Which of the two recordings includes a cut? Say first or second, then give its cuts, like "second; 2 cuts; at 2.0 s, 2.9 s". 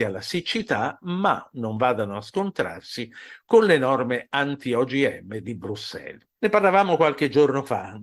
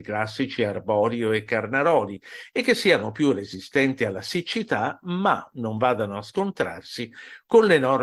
first; 1 cut; at 6.3 s